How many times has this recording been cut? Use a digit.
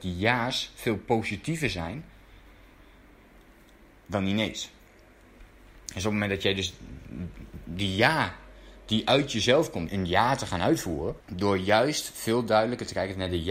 2